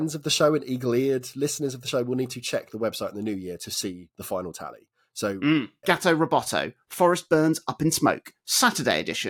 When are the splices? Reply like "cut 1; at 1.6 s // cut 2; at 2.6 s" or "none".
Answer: cut 1; at 5.8 s